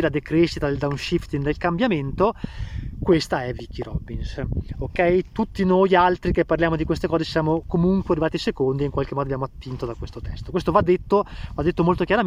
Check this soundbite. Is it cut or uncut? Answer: uncut